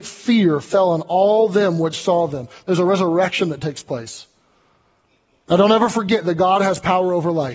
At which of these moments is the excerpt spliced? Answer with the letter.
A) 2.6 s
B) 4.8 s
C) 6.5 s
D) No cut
D